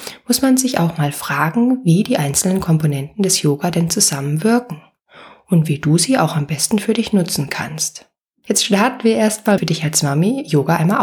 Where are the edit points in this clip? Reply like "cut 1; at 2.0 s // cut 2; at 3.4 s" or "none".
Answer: cut 1; at 9.6 s